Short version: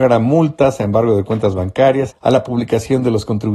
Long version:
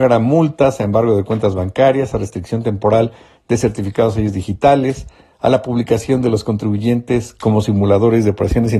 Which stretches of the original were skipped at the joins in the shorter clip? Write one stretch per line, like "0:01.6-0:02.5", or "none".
0:02.1-0:05.3